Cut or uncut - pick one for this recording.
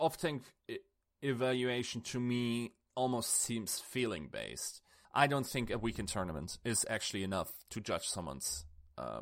cut